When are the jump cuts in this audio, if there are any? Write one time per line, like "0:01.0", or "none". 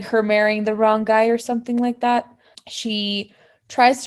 0:02.5